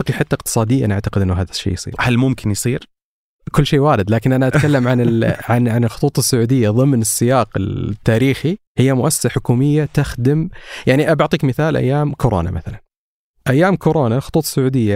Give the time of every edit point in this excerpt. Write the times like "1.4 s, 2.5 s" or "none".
2.0 s, 8.7 s